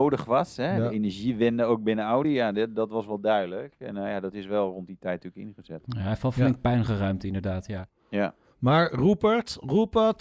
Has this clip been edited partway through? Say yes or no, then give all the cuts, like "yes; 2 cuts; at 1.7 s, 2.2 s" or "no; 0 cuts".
no; 0 cuts